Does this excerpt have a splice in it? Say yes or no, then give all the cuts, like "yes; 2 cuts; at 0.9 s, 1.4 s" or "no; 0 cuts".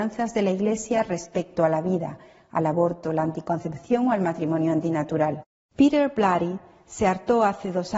yes; 1 cut; at 5.7 s